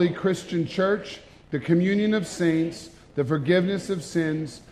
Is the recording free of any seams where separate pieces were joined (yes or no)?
yes